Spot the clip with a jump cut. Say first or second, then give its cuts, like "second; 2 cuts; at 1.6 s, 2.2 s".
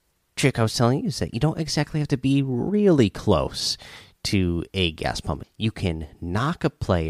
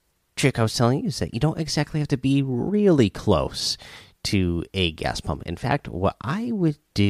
first; 1 cut; at 5.4 s